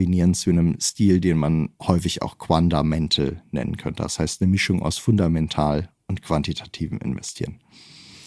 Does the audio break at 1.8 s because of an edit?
yes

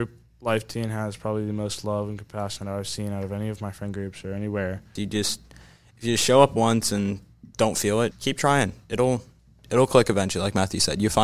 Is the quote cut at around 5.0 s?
yes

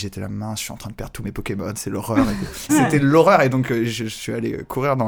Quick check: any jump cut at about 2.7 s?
yes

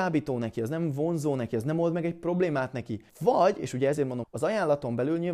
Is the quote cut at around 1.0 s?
no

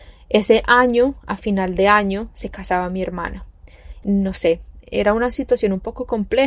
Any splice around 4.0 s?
yes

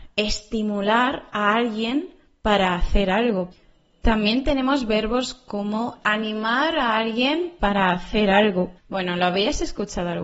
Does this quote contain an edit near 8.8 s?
yes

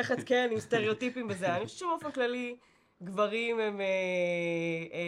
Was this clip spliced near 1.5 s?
no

